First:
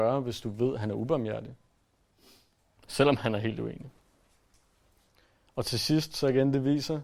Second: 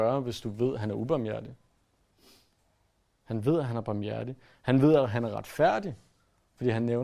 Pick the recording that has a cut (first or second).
first